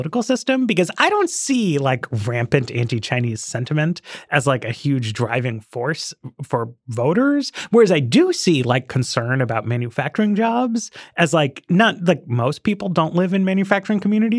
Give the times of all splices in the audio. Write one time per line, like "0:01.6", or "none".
none